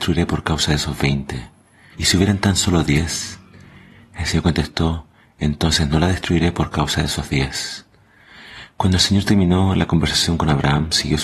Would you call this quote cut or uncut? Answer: cut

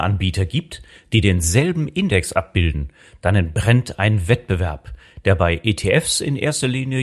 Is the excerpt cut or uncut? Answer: uncut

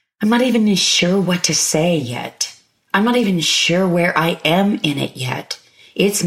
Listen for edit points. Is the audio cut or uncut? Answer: uncut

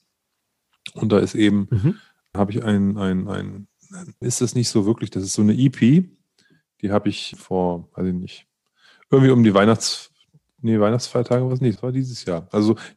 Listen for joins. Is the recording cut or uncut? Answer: cut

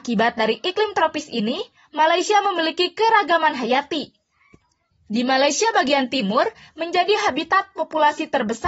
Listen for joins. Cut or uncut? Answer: cut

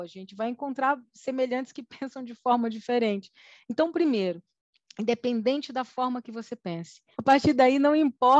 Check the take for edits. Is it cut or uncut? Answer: cut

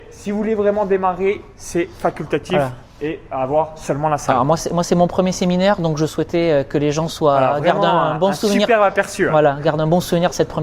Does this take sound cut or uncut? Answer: uncut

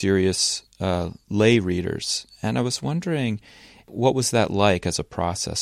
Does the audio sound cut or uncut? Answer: uncut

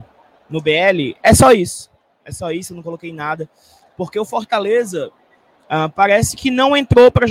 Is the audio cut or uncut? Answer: uncut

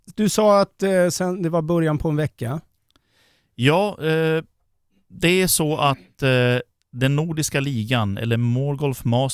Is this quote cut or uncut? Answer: uncut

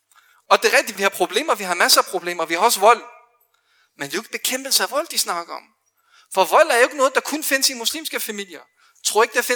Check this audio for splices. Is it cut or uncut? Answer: cut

